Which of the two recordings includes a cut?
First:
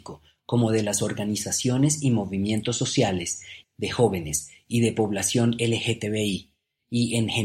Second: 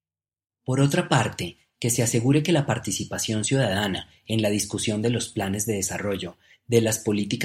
first; 1 cut; at 3.6 s

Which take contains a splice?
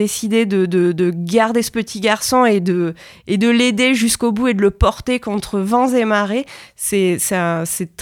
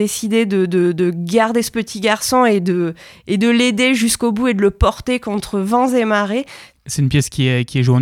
second; 1 cut; at 6.7 s

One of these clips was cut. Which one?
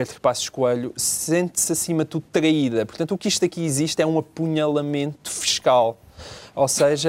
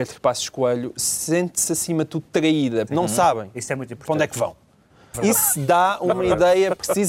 second; 2 cuts; at 2.9 s, 5.1 s

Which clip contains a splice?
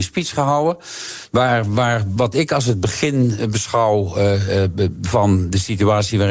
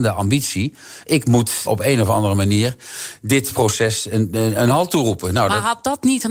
second; 1 cut; at 1.7 s

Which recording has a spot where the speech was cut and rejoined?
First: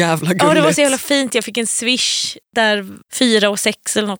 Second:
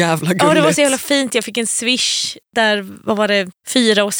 first; 1 cut; at 3.0 s

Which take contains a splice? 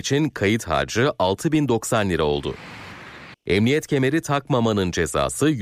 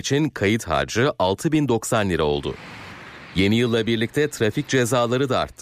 first; 1 cut; at 3.3 s

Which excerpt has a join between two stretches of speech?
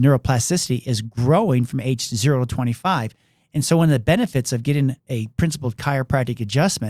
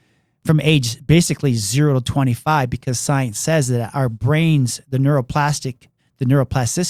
second; 1 cut; at 6.0 s

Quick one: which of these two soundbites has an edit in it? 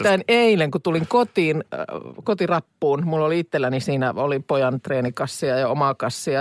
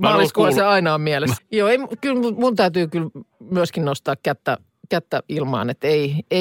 second; 1 cut; at 1.4 s

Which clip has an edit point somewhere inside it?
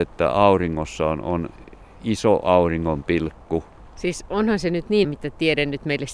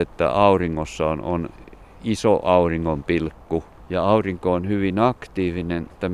first; 2 cuts; at 3.8 s, 5.0 s

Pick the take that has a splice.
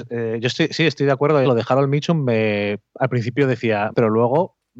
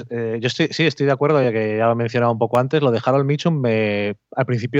first; 2 cuts; at 1.4 s, 3.9 s

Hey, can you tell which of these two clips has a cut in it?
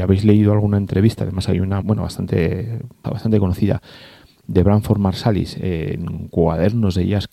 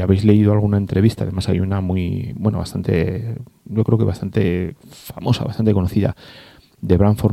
first; 2 cuts; at 1.8 s, 3.0 s

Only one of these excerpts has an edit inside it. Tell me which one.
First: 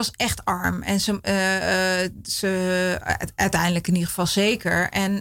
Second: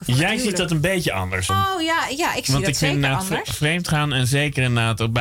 second; 1 cut; at 1.5 s

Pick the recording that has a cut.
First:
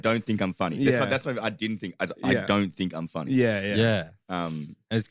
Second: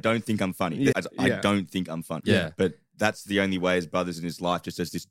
second; 2 cuts; at 0.9 s, 2.2 s

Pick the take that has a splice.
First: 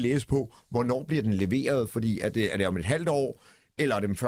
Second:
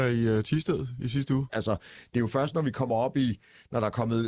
second; 1 cut; at 1.5 s

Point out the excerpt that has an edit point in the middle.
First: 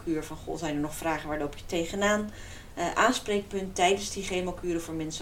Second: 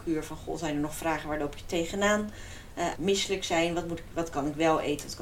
second; 1 cut; at 2.9 s

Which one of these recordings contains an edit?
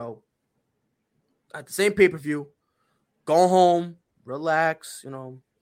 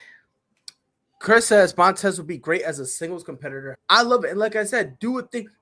second; 1 cut; at 3.7 s

